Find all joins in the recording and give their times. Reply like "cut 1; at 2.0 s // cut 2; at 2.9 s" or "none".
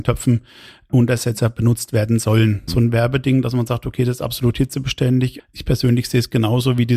cut 1; at 2.7 s // cut 2; at 5.4 s

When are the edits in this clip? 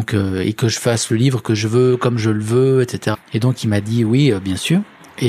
cut 1; at 3.1 s

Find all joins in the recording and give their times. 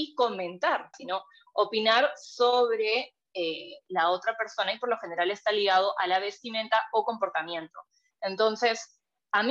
cut 1; at 0.9 s

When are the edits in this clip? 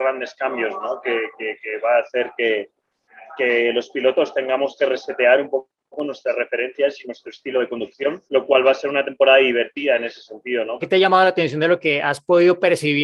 cut 1; at 8.3 s // cut 2; at 10.8 s

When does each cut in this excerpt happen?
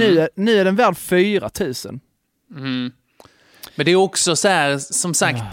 none

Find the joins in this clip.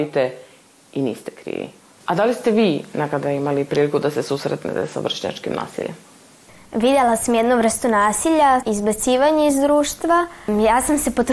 cut 1; at 8.6 s

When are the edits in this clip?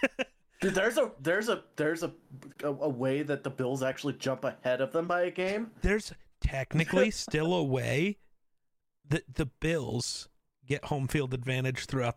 none

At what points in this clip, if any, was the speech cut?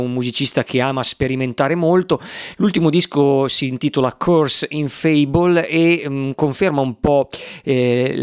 none

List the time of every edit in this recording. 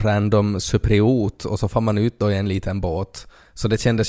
none

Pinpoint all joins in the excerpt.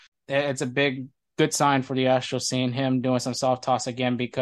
none

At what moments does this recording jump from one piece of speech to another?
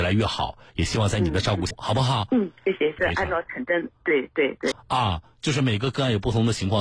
cut 1; at 1.7 s // cut 2; at 3.0 s // cut 3; at 4.7 s

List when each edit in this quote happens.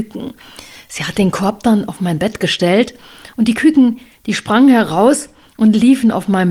none

